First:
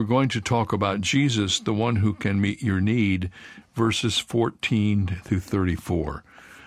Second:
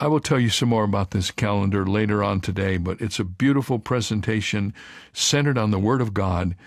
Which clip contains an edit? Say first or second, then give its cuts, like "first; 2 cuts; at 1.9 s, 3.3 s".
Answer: first; 1 cut; at 3.6 s